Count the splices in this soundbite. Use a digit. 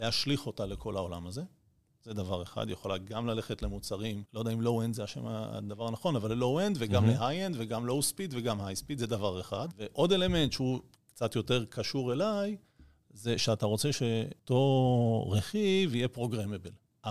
1